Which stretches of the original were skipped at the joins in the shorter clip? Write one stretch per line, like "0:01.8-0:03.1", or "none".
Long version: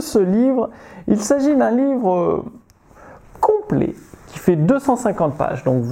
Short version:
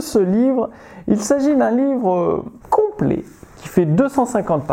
0:02.6-0:03.3